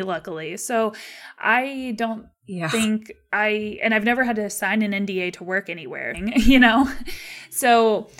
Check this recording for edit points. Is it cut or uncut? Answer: cut